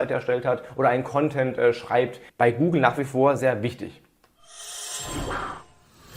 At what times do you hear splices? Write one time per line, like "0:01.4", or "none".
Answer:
0:02.3
0:03.4